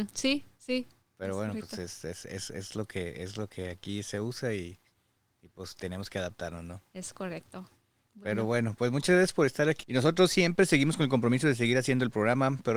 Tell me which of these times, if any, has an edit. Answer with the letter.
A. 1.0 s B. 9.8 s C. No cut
B